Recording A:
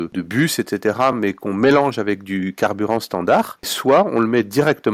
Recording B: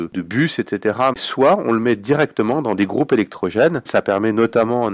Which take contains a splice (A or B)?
B